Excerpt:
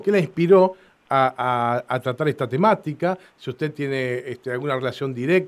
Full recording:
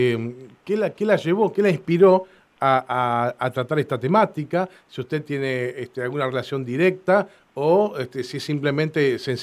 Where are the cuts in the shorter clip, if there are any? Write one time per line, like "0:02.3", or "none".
none

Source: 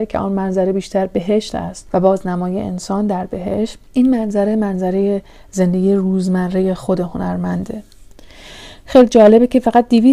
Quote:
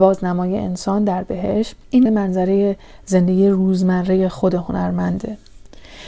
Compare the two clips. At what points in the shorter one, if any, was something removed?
0:02.1

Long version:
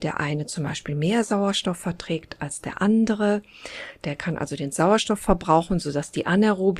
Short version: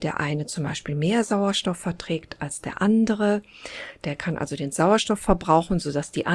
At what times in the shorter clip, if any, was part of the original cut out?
none

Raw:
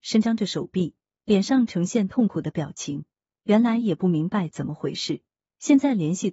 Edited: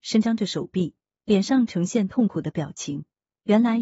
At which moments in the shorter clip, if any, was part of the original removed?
none

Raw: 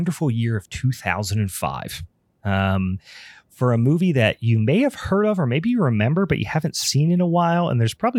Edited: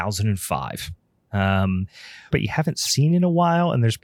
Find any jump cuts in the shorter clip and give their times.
0:02.3

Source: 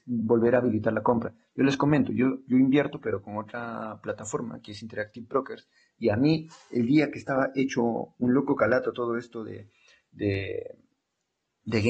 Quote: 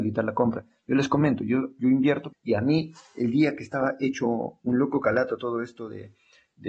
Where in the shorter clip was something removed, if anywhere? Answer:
0:02.3

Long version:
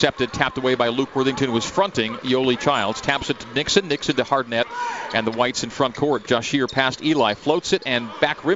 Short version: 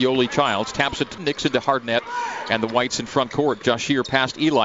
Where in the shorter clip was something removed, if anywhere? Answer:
0:01.2

